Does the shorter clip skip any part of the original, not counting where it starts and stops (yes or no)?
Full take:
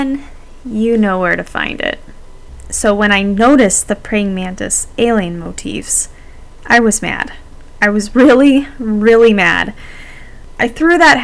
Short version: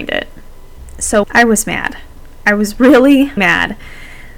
yes